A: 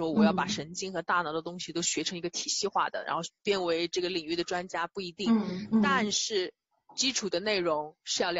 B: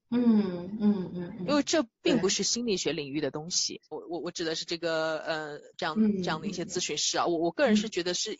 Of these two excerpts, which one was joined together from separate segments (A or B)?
B